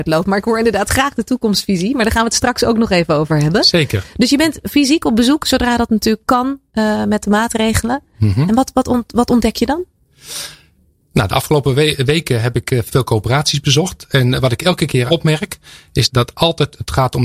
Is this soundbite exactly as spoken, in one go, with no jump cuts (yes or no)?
yes